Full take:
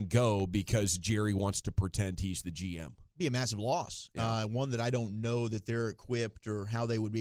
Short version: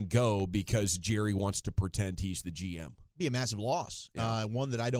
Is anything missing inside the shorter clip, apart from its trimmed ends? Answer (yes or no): no